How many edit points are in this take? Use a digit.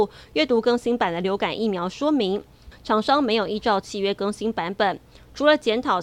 1